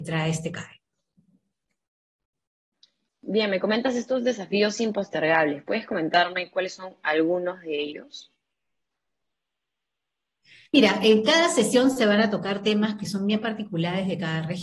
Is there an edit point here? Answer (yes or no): no